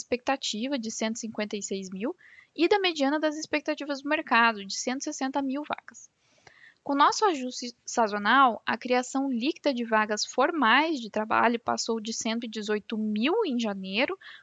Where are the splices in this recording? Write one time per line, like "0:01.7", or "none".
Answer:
none

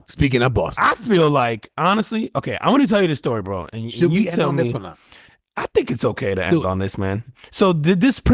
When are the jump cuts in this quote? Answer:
none

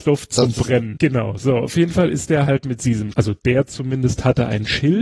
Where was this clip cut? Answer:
0:01.0
0:03.1

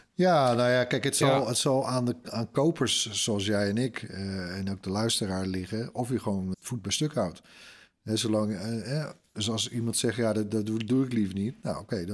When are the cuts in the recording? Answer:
0:06.5

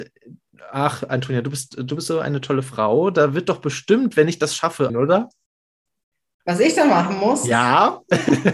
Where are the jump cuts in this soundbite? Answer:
0:04.9

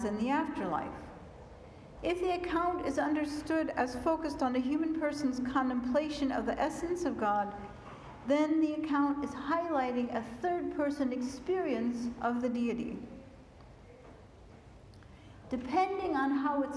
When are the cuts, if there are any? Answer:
0:02.0
0:15.4

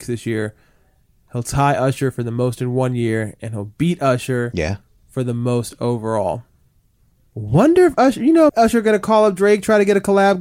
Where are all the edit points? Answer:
0:08.5

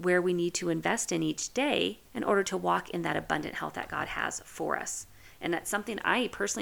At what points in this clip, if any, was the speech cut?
0:02.0

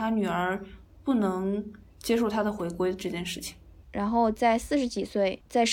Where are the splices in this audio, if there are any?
0:03.8

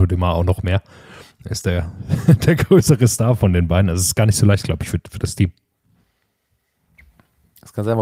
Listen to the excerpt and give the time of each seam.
none

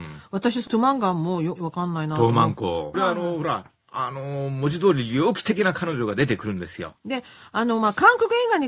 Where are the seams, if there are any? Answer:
0:01.6
0:02.9
0:06.9

